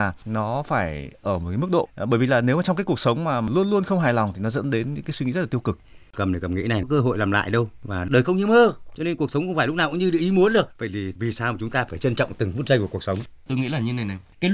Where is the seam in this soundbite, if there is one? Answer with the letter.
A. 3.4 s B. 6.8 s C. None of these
B